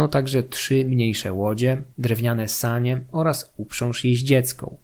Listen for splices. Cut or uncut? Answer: cut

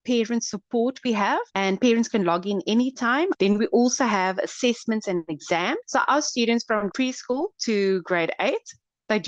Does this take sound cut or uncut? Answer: cut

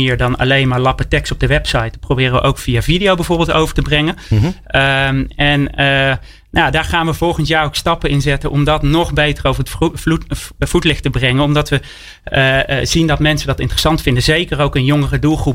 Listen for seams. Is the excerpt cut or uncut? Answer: uncut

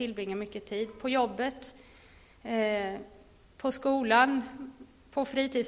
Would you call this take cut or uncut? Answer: uncut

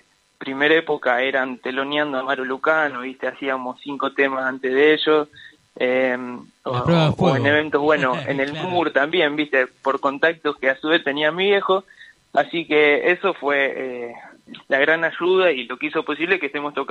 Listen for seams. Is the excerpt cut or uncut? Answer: uncut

